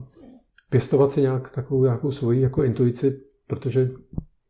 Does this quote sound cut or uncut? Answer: uncut